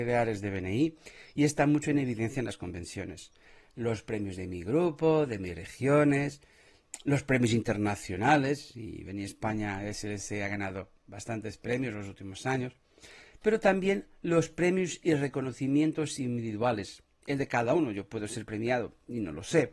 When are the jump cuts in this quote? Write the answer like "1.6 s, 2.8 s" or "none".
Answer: none